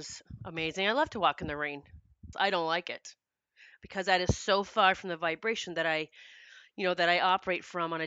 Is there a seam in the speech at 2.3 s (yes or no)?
yes